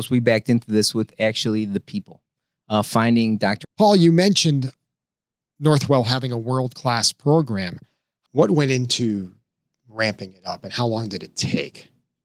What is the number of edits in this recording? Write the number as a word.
one